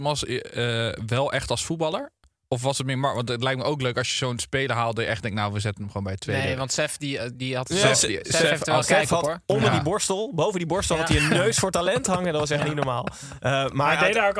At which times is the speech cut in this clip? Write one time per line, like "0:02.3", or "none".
none